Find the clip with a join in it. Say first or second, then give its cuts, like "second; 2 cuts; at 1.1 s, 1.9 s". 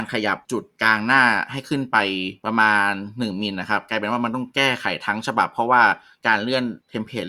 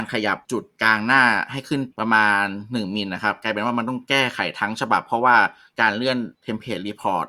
second; 1 cut; at 1.9 s